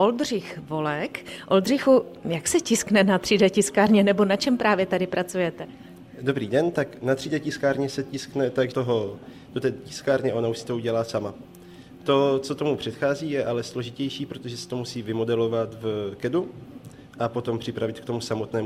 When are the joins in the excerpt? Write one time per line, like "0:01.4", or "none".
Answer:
0:08.7